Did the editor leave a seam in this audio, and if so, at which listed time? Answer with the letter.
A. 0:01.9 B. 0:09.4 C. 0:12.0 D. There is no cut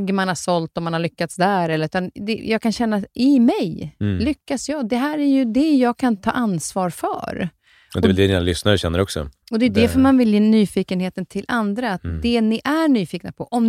B